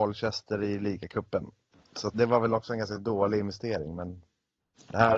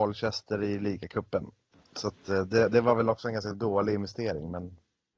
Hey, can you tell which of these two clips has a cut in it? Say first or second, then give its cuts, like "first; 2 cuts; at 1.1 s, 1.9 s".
first; 1 cut; at 2.1 s